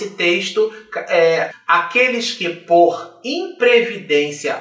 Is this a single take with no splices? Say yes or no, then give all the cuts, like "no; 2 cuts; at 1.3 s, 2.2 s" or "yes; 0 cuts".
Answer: no; 1 cut; at 1.5 s